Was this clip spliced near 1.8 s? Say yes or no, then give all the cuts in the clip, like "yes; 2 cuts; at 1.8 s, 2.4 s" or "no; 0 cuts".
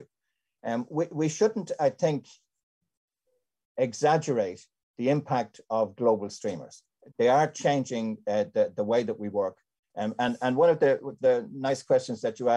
no; 2 cuts; at 7.1 s, 9.8 s